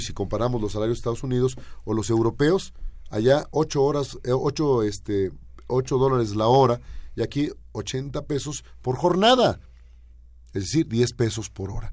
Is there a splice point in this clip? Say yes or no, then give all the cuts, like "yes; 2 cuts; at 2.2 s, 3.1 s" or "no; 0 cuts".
no; 0 cuts